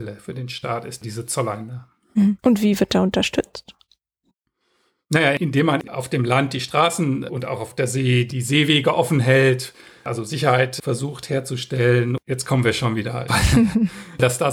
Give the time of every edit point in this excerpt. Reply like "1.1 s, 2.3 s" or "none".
2.4 s, 13.3 s